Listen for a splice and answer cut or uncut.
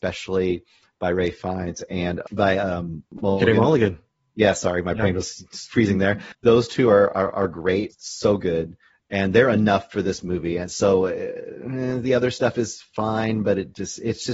uncut